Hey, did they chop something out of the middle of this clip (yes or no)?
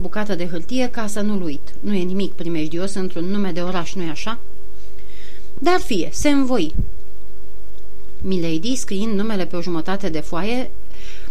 yes